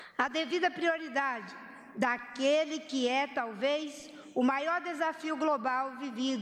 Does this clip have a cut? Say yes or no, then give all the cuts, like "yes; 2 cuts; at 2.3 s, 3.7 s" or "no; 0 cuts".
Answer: no; 0 cuts